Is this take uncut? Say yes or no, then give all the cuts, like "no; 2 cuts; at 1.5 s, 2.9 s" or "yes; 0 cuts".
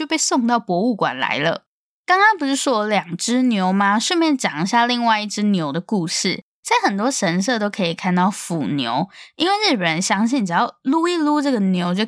no; 1 cut; at 6.5 s